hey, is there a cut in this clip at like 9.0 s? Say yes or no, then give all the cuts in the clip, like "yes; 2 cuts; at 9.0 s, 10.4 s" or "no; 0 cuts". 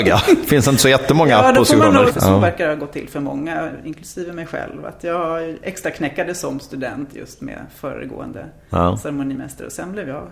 no; 1 cut; at 2.1 s